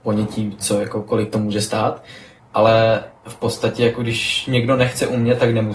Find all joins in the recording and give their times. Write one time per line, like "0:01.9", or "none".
0:02.4